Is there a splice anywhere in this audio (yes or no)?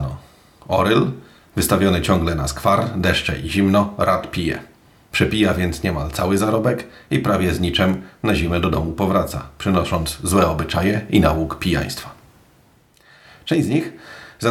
no